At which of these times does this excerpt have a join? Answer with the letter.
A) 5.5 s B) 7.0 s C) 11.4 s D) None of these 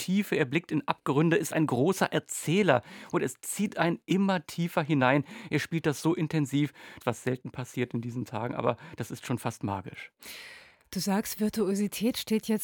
B